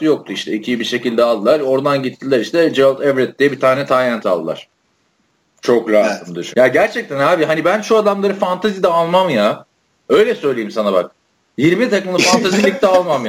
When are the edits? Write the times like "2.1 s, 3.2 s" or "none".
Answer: 6.5 s